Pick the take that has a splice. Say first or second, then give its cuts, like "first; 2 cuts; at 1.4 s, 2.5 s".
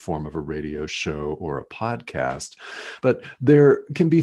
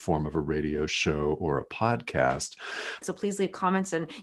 second; 1 cut; at 3.0 s